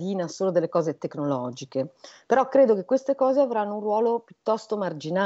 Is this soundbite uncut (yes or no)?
yes